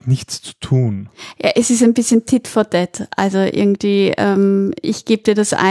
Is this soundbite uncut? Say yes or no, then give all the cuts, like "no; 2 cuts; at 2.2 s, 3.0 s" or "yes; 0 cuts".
yes; 0 cuts